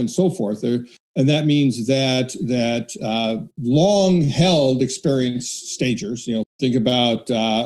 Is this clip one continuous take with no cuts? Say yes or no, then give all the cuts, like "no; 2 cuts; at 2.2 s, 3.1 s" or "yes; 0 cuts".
no; 2 cuts; at 1.0 s, 6.4 s